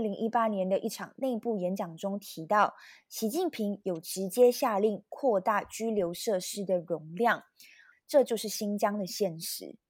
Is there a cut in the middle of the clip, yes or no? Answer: yes